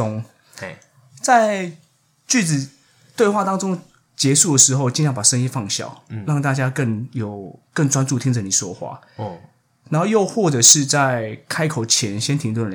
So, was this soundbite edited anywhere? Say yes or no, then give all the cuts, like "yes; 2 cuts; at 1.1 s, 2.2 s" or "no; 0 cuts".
no; 0 cuts